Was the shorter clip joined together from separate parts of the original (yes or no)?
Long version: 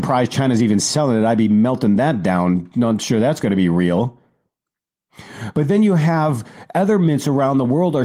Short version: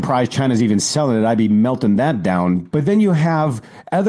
yes